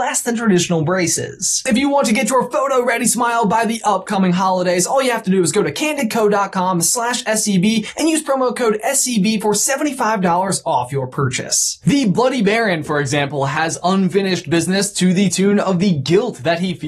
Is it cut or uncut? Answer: cut